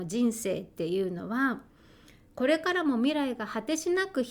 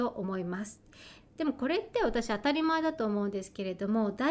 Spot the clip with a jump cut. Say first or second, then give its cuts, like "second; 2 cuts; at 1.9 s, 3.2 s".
second; 1 cut; at 1.2 s